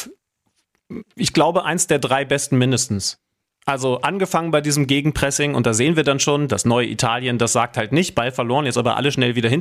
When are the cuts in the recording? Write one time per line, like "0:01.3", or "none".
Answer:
0:01.1